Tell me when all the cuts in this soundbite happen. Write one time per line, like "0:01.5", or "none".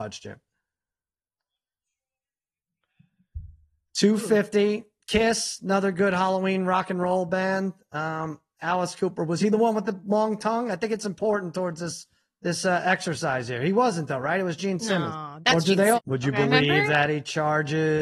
0:15.9